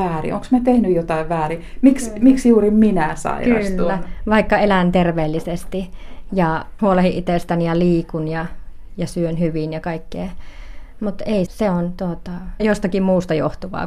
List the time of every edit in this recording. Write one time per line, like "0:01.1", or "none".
0:06.8
0:11.5
0:12.6